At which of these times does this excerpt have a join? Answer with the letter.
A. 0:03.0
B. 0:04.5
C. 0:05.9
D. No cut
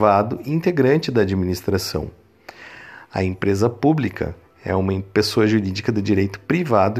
D